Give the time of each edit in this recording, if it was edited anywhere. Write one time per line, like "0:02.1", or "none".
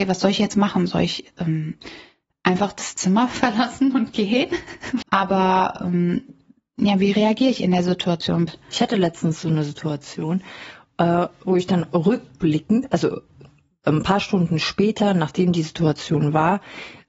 0:05.0
0:08.5